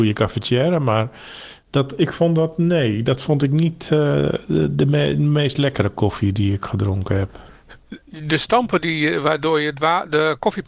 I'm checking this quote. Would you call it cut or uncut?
uncut